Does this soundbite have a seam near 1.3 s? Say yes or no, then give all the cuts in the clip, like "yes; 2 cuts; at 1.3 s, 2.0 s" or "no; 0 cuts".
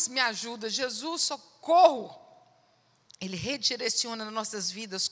no; 1 cut; at 3.1 s